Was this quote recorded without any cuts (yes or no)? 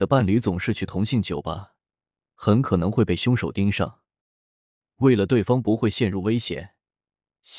yes